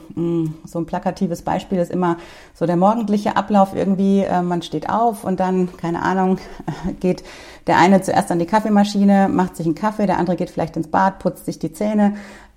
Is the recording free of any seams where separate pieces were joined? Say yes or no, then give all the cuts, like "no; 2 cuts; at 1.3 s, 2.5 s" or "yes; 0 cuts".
yes; 0 cuts